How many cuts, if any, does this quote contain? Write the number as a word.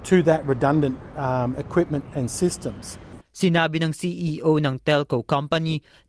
one